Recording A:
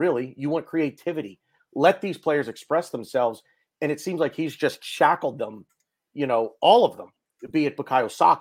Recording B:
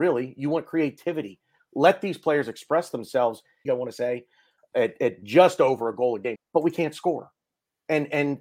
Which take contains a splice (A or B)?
B